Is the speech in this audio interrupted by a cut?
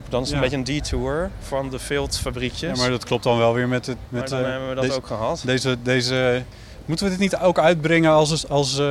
no; 0 cuts

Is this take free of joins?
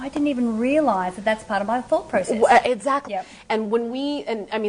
no; 1 cut; at 3.1 s

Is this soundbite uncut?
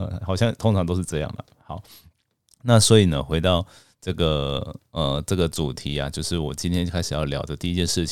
yes; 0 cuts

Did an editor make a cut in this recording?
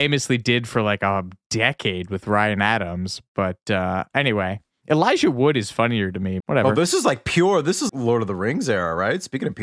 yes; 2 cuts; at 6.4 s, 7.9 s

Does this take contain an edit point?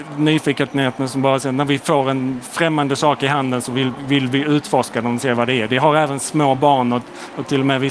no; 0 cuts

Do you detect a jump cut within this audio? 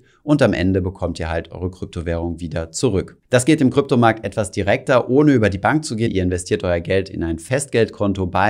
yes; 2 cuts; at 3.2 s, 6.1 s

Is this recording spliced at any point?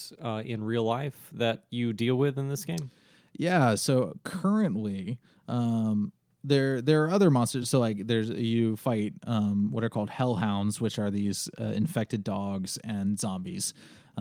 no; 0 cuts

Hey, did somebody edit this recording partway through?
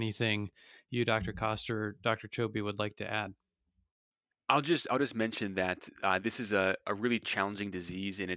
no; 0 cuts

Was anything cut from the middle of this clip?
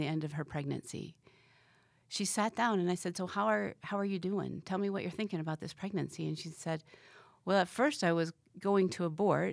no; 0 cuts

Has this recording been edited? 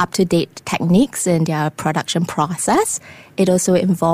no; 0 cuts

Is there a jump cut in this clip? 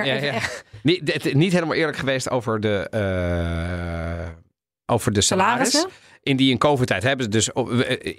no; 0 cuts

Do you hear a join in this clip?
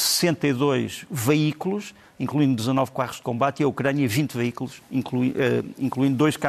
no; 0 cuts

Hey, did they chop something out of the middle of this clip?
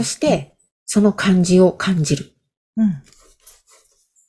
no; 0 cuts

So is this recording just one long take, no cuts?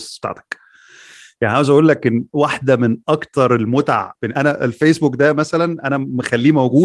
no; 1 cut; at 4.3 s

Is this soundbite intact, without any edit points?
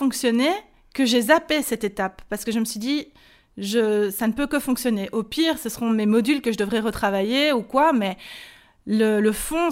yes; 0 cuts

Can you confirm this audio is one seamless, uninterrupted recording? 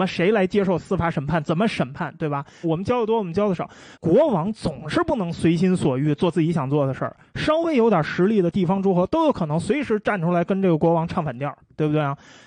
no; 2 cuts; at 2.6 s, 3.9 s

